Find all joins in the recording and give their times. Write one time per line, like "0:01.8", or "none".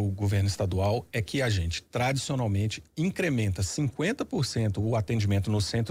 none